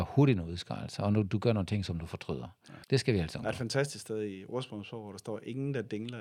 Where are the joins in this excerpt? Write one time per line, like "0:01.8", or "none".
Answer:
0:02.8